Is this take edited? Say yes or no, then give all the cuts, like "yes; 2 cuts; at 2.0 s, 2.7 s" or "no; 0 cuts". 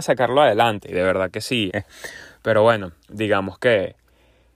yes; 2 cuts; at 1.7 s, 3.0 s